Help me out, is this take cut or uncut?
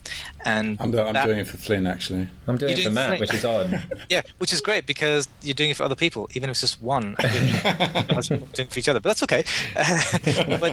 uncut